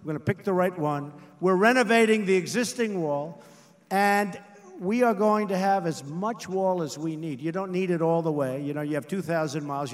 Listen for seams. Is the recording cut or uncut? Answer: uncut